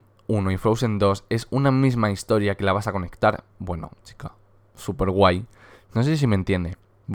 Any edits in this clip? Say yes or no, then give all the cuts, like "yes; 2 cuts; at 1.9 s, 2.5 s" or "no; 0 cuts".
yes; 2 cuts; at 3.5 s, 5.8 s